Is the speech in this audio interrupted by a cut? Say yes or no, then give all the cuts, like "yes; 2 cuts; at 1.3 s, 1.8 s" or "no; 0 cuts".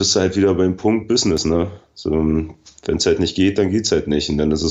no; 0 cuts